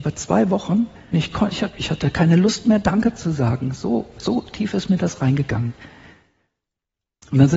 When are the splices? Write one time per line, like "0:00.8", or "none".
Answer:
0:01.1